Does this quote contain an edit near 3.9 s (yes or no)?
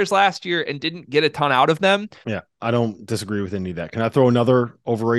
no